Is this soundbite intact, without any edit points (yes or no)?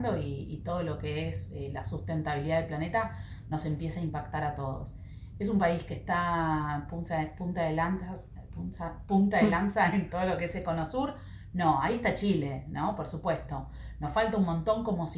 yes